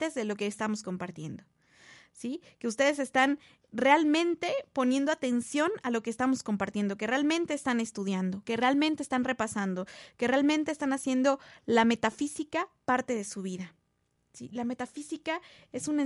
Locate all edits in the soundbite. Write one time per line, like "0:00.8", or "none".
none